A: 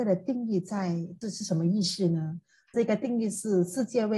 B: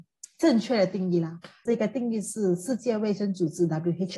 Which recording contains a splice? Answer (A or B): A